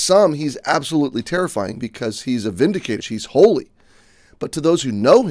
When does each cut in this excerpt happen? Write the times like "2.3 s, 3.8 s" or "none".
3.0 s